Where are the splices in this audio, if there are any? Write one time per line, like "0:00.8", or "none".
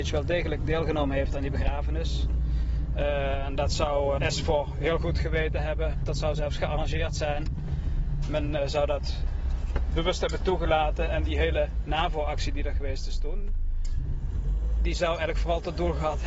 0:04.2